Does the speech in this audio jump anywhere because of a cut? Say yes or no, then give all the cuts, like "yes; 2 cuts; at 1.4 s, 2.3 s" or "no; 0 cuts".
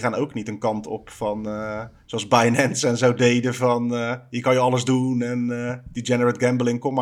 no; 0 cuts